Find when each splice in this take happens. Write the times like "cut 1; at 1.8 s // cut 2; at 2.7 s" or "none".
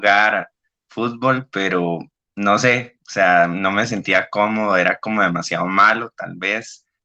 none